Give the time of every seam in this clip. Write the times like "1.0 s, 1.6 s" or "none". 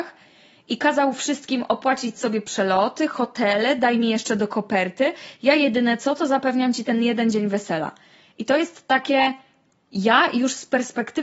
none